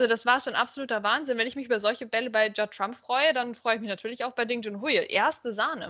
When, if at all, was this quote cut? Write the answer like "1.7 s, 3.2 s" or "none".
none